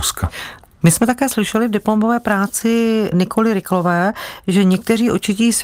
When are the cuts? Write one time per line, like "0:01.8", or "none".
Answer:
none